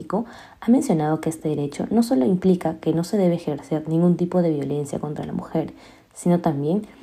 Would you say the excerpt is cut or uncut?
uncut